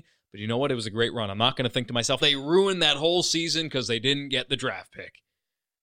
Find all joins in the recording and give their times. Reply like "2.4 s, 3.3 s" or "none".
2.2 s